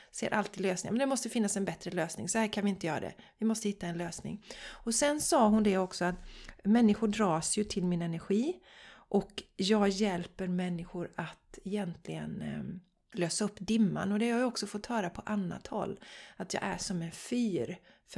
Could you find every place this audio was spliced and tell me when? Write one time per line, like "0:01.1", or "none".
none